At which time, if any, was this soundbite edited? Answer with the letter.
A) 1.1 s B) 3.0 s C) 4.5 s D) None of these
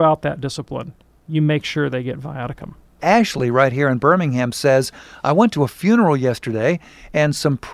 B